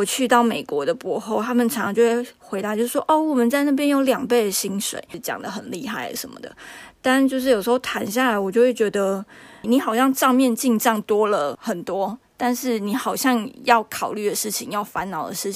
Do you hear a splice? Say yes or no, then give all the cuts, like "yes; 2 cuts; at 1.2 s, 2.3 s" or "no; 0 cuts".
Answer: no; 0 cuts